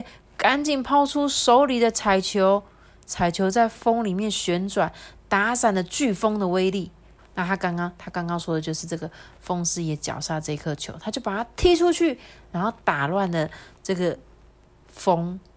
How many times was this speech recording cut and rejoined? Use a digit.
1